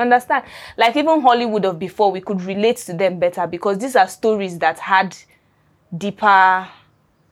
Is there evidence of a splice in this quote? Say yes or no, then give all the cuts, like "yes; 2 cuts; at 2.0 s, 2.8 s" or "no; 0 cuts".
no; 0 cuts